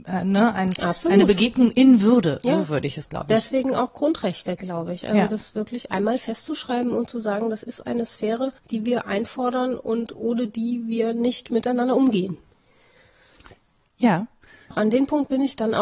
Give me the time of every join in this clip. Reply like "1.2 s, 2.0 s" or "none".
8.6 s, 14.7 s